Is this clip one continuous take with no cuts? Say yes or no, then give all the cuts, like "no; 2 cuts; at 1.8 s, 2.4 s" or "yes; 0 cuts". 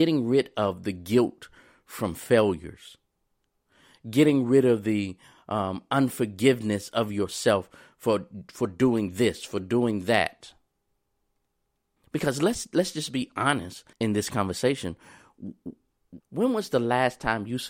no; 3 cuts; at 12.0 s, 13.9 s, 16.2 s